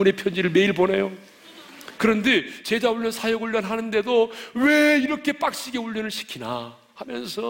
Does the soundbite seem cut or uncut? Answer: cut